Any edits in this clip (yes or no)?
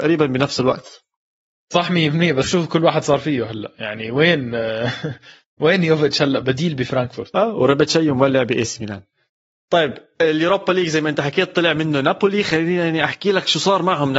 yes